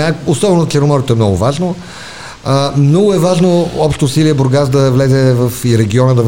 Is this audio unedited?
yes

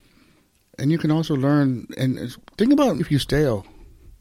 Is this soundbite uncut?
no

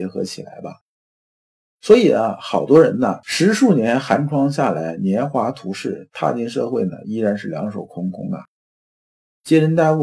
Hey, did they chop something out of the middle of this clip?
no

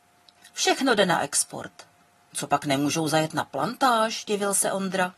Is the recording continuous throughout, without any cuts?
no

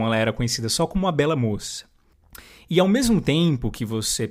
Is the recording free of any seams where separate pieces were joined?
yes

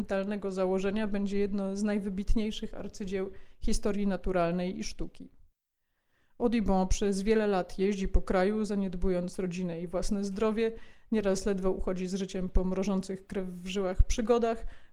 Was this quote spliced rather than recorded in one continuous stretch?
no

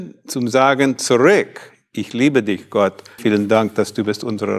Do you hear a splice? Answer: yes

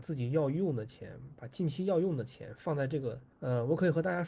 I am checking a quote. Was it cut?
yes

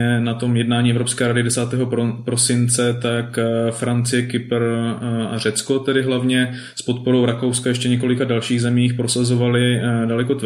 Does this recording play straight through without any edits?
yes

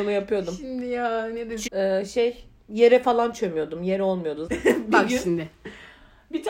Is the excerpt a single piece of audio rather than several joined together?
no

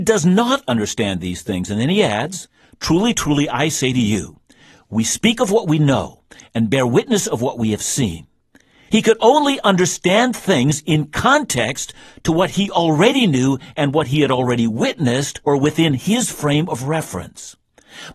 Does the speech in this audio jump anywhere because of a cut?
yes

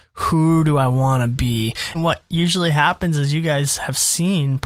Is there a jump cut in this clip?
yes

